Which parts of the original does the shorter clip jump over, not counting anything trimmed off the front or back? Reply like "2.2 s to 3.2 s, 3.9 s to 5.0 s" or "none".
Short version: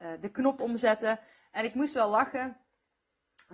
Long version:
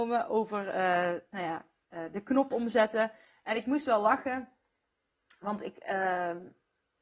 none